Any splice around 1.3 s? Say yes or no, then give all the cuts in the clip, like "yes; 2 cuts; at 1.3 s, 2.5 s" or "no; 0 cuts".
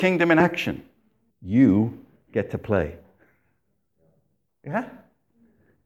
yes; 1 cut; at 1.3 s